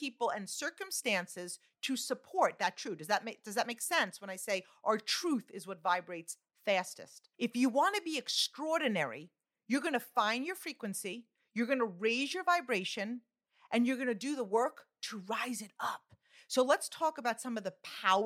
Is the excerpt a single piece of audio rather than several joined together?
no; 1 cut; at 7.3 s

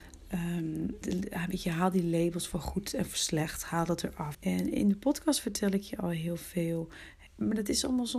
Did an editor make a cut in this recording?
yes; 3 cuts; at 1.0 s, 4.3 s, 7.3 s

